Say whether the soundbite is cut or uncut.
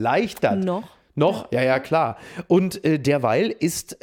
uncut